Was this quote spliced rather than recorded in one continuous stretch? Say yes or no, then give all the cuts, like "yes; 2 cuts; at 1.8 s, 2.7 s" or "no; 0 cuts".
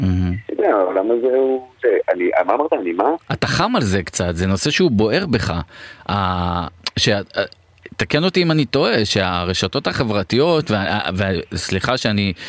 no; 0 cuts